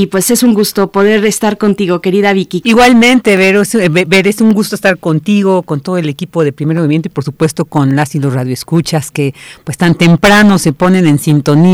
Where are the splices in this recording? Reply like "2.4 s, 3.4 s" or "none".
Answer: 2.6 s